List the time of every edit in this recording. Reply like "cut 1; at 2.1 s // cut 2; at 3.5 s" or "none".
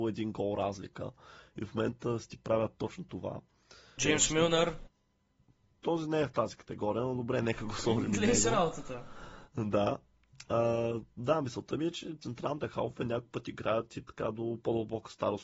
cut 1; at 4.0 s